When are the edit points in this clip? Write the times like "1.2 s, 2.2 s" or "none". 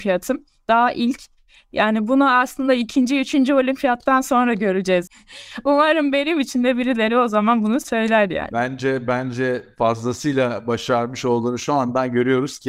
5.1 s